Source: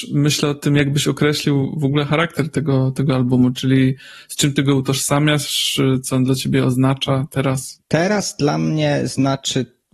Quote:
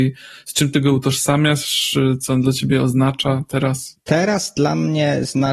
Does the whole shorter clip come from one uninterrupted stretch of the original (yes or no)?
yes